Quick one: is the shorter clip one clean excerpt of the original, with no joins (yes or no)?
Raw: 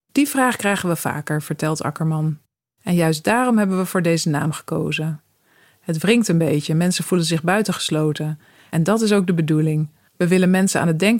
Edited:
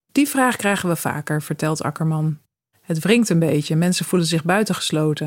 no